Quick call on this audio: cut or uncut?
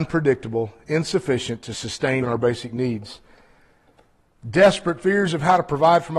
cut